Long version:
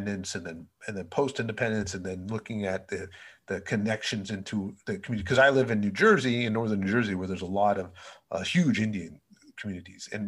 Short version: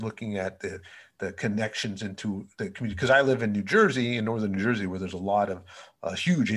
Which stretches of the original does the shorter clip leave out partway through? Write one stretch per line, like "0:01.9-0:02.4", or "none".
none